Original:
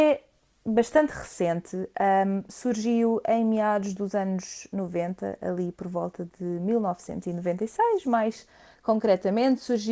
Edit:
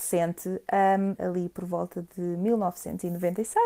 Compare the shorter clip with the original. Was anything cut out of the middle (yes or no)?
yes